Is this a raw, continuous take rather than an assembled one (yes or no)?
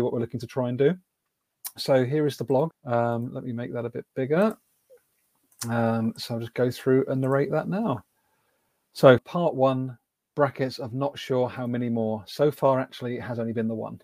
no